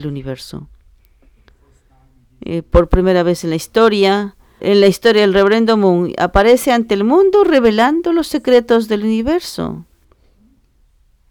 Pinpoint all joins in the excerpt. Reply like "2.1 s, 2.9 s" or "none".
4.6 s